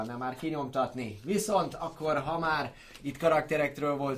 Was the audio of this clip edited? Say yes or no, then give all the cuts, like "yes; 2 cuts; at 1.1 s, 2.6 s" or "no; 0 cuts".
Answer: no; 0 cuts